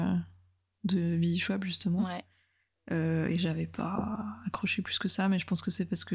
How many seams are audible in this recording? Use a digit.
0